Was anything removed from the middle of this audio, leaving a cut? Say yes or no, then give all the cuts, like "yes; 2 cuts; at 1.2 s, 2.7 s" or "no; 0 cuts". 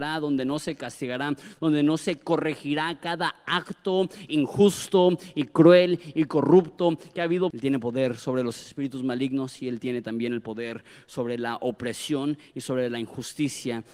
yes; 1 cut; at 7.5 s